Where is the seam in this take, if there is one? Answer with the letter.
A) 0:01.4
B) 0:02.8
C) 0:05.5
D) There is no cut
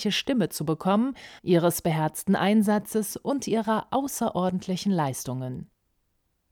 A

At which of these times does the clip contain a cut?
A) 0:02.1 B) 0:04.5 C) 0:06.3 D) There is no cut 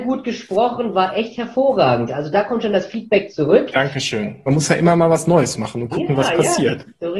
B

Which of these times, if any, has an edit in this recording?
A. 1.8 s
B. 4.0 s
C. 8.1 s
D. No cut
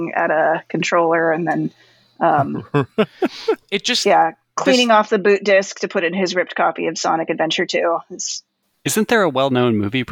D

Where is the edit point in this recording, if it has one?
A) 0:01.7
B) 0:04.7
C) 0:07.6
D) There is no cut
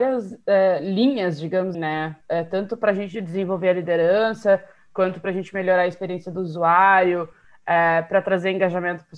A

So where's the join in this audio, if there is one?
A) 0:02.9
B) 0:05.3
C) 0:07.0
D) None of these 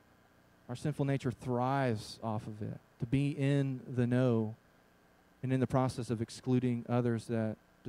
D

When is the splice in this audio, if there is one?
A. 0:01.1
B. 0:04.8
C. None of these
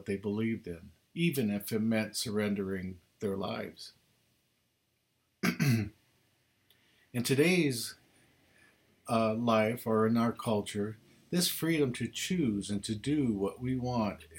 A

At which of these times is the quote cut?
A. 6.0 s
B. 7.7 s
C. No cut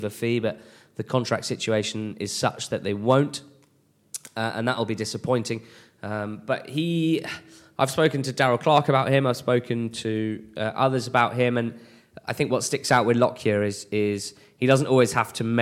C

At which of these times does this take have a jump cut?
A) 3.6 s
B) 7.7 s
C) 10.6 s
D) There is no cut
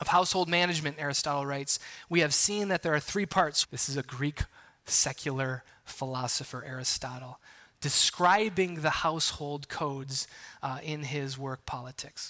A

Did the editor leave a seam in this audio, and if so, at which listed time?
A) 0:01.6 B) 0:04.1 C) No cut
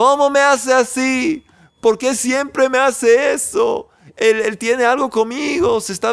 C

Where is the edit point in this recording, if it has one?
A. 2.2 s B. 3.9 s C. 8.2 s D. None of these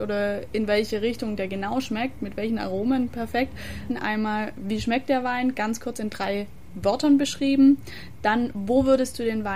B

